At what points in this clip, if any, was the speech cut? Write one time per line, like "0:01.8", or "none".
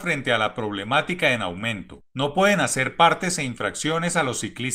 0:02.1